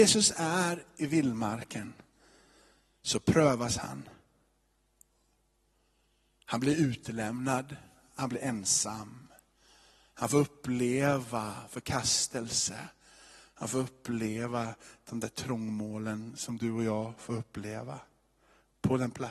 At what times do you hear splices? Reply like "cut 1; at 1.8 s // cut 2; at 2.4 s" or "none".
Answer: none